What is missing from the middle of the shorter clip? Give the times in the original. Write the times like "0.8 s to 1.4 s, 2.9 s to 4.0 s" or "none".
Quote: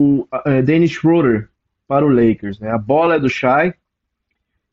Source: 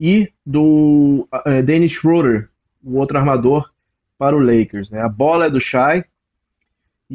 2.8 s to 4.1 s